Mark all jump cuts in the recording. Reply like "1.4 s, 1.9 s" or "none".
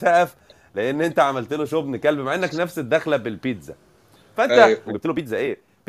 4.9 s